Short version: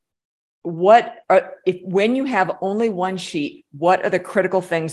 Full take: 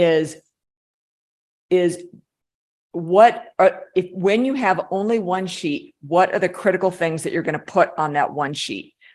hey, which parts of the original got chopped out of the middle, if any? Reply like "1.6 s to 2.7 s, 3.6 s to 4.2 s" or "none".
none